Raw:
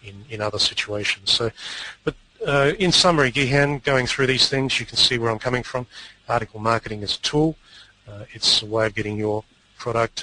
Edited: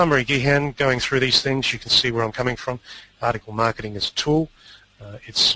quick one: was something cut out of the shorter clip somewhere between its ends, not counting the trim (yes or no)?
no